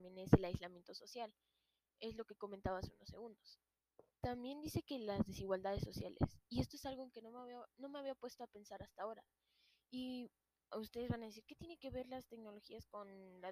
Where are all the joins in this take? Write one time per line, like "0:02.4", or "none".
none